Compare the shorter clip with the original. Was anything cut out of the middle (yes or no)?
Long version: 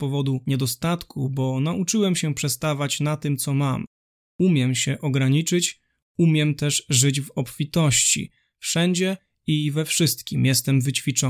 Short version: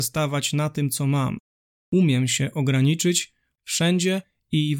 yes